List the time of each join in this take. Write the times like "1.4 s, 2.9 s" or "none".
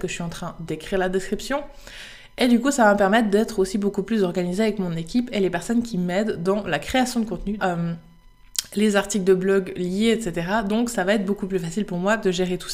7.6 s